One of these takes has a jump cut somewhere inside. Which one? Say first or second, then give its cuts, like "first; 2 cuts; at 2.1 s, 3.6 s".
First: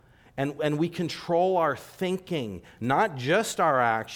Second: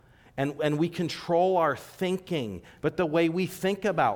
second; 1 cut; at 2.8 s